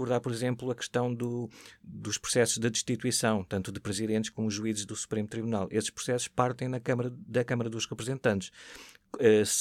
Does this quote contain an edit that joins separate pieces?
no; 0 cuts

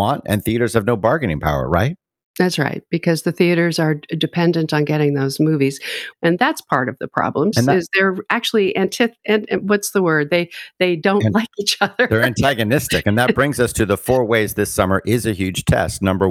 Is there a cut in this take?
yes; 2 cuts; at 6.1 s, 7.5 s

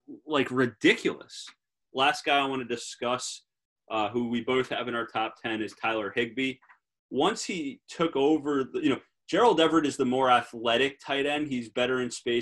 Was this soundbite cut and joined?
yes; 1 cut; at 1.8 s

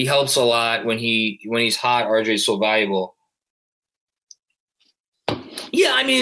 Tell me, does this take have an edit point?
no; 0 cuts

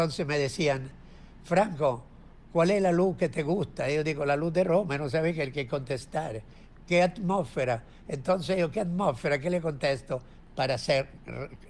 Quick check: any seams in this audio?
no; 0 cuts

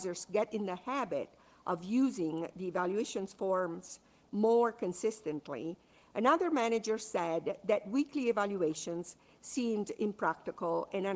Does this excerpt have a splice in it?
no; 0 cuts

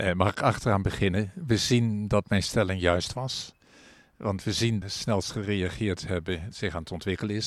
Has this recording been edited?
yes; 2 cuts; at 4.8 s, 6.5 s

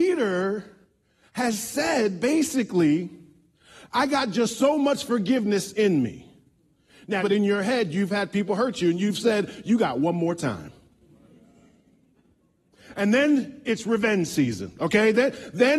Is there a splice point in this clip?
yes; 1 cut; at 7.2 s

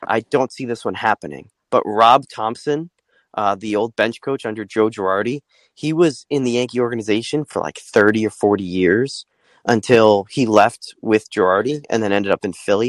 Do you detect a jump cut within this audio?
no; 0 cuts

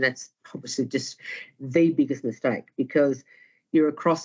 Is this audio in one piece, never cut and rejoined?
yes; 0 cuts

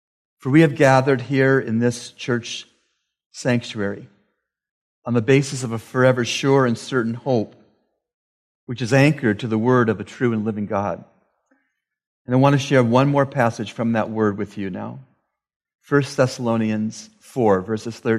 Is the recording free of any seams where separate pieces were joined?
yes; 0 cuts

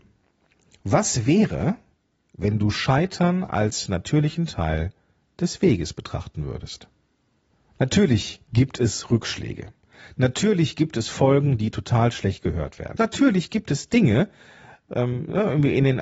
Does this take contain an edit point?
yes; 1 cut; at 13.0 s

